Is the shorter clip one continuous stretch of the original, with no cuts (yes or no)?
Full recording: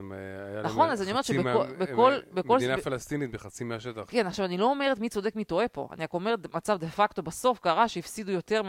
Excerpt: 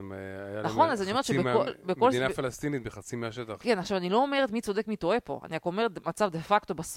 no